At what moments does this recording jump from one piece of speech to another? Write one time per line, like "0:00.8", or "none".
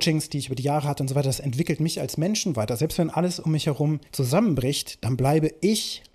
0:04.1